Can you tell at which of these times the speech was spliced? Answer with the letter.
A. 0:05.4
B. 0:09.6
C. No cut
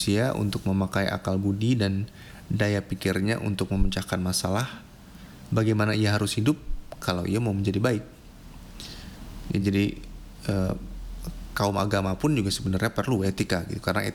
C